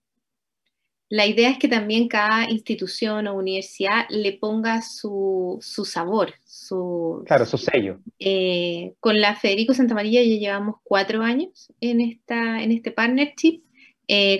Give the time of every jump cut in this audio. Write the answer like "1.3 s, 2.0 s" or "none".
8.2 s